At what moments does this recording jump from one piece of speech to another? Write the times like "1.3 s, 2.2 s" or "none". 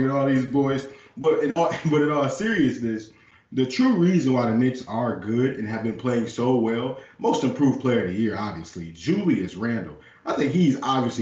none